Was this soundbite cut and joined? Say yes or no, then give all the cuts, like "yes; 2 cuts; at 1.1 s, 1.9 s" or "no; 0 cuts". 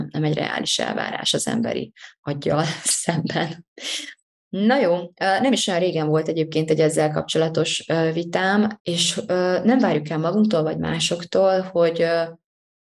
yes; 1 cut; at 8.8 s